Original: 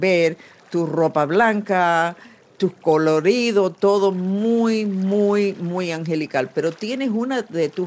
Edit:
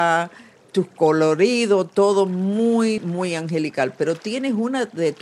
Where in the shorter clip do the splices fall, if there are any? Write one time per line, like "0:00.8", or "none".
0:03.0